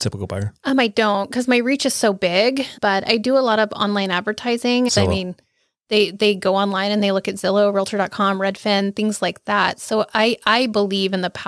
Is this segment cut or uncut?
cut